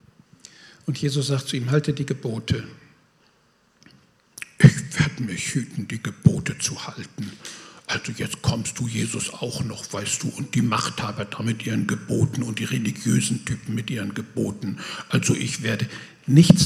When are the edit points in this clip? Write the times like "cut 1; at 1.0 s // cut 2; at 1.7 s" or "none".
none